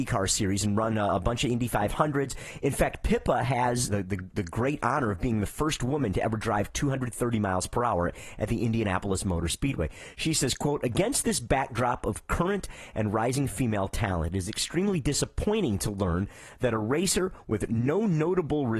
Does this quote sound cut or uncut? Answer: cut